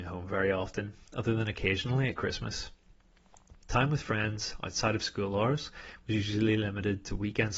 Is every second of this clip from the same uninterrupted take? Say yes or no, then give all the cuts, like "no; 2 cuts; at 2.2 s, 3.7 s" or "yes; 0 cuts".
no; 1 cut; at 3.5 s